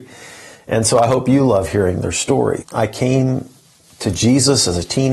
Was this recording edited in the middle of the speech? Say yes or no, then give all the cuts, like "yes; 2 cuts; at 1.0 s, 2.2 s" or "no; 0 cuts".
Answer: yes; 1 cut; at 2.6 s